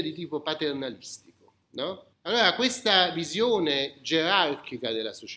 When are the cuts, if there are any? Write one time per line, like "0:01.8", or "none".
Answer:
0:02.1